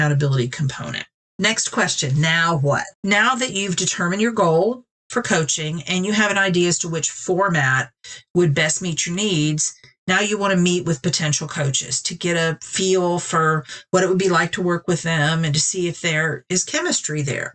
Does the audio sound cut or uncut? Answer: cut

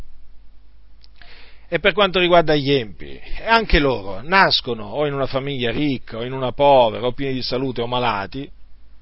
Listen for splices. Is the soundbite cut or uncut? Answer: uncut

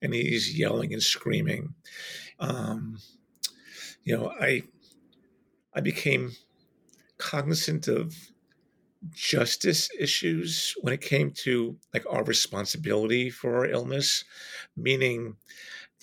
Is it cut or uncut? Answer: cut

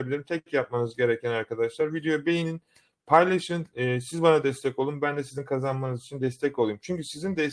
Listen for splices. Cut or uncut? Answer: uncut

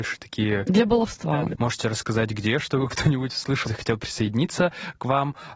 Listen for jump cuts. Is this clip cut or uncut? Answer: cut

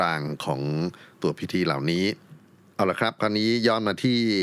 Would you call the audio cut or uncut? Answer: uncut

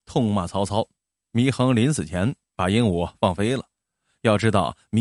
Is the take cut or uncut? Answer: cut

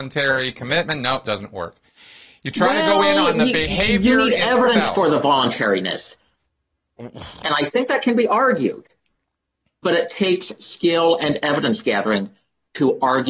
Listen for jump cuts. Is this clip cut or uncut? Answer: uncut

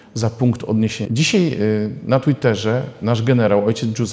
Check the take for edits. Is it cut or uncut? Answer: cut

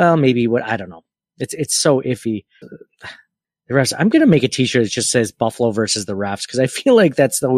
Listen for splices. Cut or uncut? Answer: cut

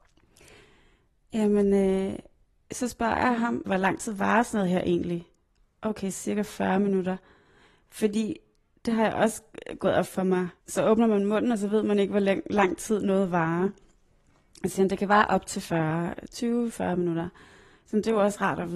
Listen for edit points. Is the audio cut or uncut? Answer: cut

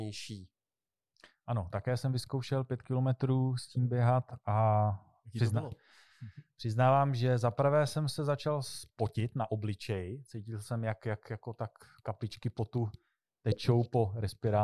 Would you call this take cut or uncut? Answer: uncut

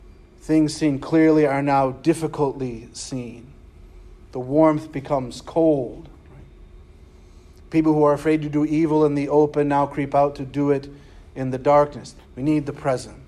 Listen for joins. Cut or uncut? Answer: cut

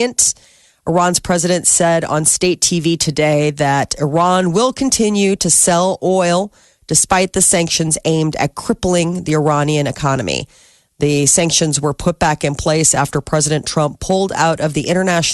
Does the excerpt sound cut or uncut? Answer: uncut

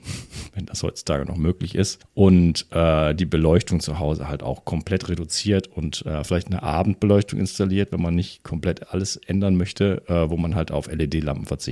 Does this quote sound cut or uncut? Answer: uncut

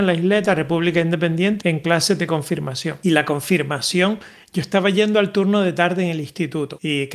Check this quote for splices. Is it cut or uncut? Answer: cut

